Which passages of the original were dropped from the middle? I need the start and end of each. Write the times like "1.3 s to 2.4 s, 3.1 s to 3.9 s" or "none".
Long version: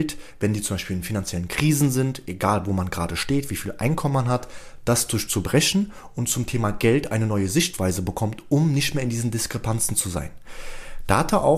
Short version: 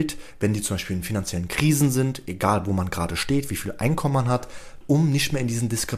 4.8 s to 8.4 s